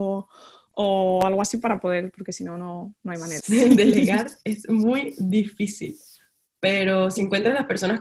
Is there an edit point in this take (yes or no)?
yes